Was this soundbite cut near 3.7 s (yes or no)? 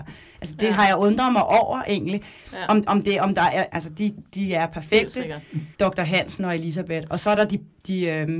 yes